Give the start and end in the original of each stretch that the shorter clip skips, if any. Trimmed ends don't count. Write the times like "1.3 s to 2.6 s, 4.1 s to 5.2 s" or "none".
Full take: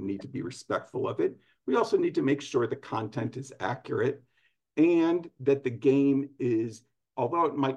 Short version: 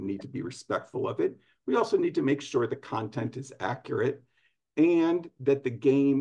none